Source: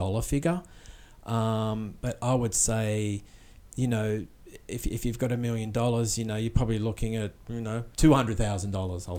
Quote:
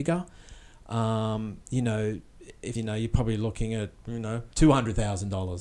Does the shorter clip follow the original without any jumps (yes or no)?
no